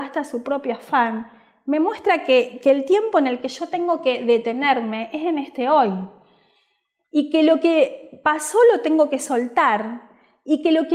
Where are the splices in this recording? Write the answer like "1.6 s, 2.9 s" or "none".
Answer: none